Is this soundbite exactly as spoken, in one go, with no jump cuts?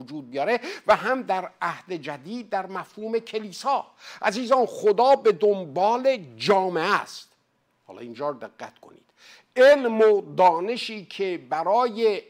yes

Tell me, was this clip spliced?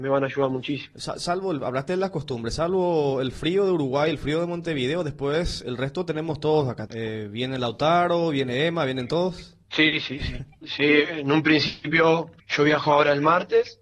yes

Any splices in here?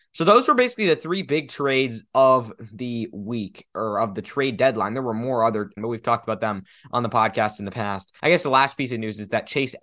yes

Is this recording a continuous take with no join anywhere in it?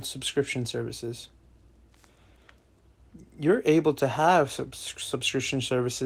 yes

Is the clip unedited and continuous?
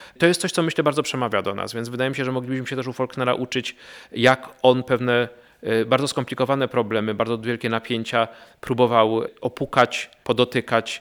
yes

